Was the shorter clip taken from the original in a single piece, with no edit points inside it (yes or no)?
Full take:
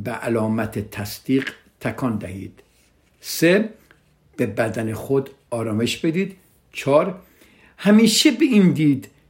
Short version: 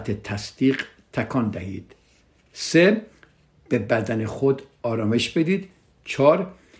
yes